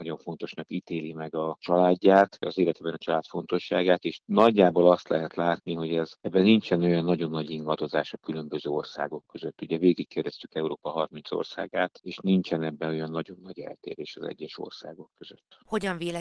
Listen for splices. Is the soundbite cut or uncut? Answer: uncut